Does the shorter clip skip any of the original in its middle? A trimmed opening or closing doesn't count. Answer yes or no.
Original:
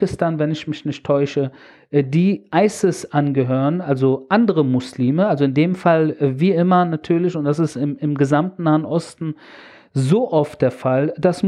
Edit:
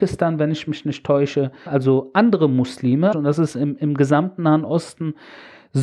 yes